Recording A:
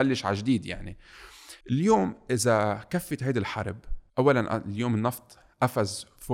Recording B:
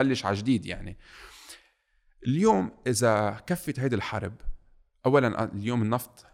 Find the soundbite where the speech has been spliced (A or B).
A